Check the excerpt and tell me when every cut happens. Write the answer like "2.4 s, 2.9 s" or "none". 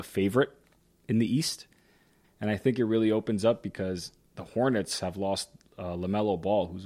2.2 s